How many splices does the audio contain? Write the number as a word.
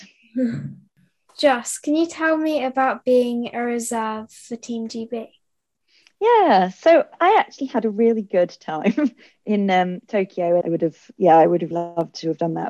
two